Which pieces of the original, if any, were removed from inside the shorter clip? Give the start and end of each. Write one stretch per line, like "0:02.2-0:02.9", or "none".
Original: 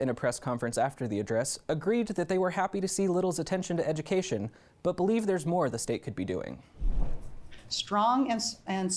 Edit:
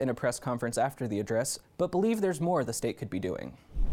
0:01.6-0:04.7